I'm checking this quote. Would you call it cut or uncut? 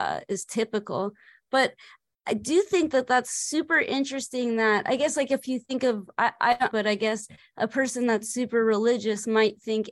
cut